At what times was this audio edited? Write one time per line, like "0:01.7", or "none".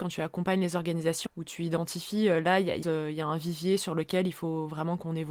0:01.3
0:02.8